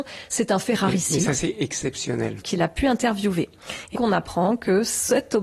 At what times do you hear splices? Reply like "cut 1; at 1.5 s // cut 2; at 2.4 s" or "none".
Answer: cut 1; at 2.4 s // cut 2; at 3.9 s